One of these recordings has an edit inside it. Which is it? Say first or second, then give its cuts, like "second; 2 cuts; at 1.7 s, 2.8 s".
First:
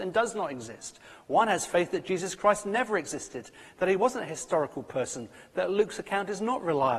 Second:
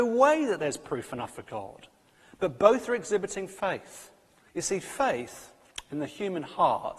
second; 1 cut; at 4.5 s